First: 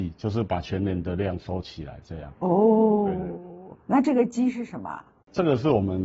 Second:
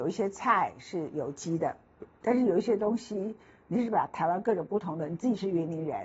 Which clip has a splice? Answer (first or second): first